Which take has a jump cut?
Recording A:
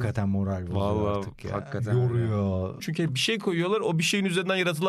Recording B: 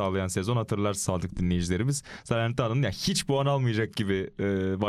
A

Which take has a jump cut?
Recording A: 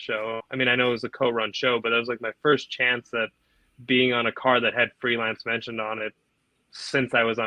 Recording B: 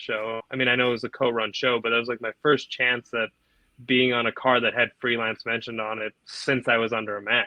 B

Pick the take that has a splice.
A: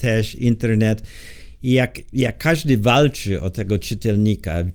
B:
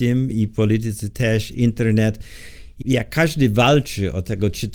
B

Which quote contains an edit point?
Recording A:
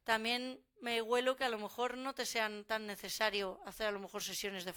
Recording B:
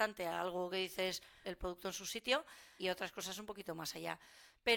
B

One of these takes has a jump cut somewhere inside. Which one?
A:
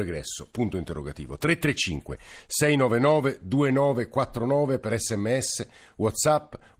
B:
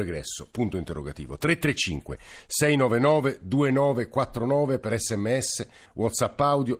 B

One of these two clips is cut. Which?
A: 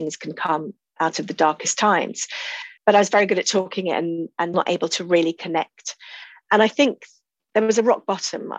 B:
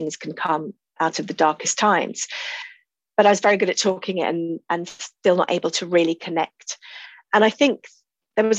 A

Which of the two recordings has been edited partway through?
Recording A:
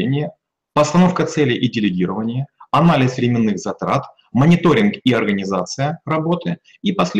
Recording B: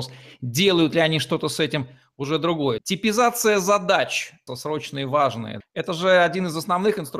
B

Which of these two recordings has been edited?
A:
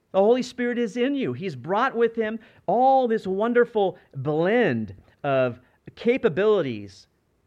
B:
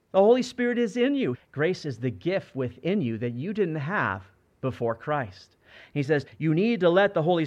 B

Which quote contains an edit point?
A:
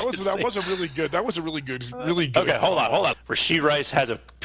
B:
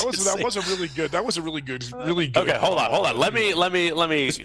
A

